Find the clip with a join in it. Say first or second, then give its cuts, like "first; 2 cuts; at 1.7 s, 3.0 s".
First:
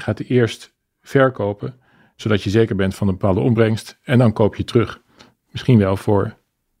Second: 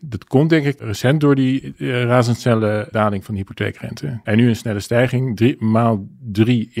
second; 2 cuts; at 2.9 s, 4.2 s